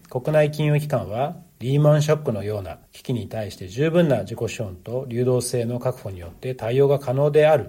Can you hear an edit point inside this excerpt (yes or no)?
yes